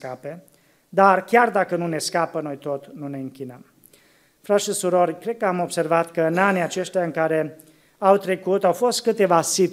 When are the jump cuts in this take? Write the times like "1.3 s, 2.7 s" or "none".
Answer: none